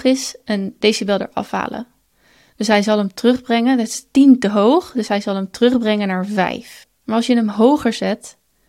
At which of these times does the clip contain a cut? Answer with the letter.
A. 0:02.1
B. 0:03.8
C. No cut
C